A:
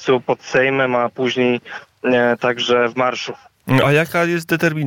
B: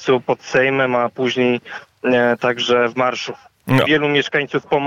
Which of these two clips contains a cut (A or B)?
B